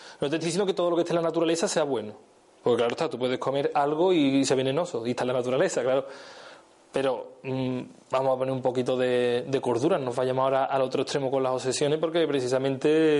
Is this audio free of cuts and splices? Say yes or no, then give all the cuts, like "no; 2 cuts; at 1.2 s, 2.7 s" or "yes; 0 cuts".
yes; 0 cuts